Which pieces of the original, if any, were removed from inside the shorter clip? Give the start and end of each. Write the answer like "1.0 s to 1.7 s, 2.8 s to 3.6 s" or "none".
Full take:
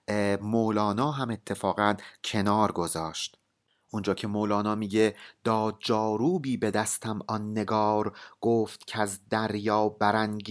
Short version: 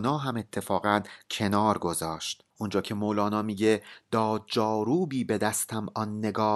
3.4 s to 3.8 s